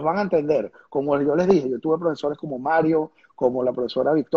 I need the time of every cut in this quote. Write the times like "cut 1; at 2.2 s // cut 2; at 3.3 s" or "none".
none